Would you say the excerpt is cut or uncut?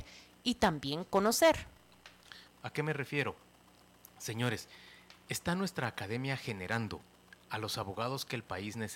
cut